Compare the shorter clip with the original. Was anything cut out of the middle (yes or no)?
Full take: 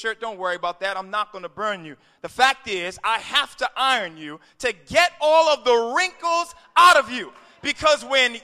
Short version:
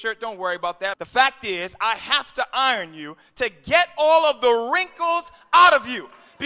yes